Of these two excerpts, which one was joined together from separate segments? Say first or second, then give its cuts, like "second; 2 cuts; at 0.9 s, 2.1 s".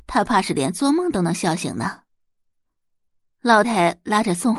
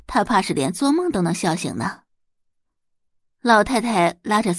first; 1 cut; at 3.6 s